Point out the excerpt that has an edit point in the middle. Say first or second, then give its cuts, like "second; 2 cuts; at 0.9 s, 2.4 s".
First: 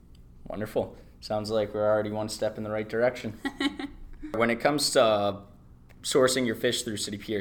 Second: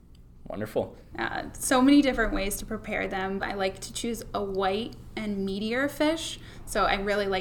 second; 2 cuts; at 1.1 s, 3.4 s